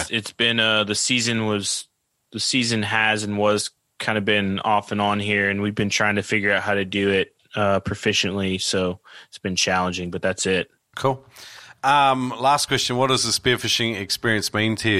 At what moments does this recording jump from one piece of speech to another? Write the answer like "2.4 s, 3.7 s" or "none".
none

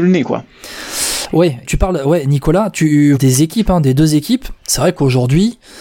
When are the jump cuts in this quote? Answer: 1.6 s, 3.1 s

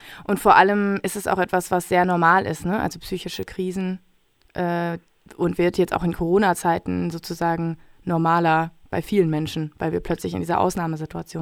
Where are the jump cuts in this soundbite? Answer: none

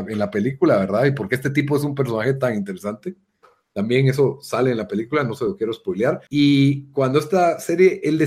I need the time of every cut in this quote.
6.3 s

